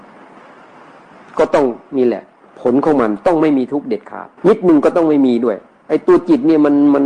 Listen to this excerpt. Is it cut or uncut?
cut